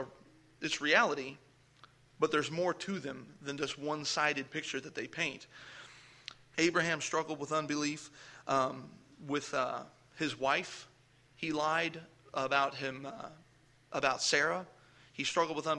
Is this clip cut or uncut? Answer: cut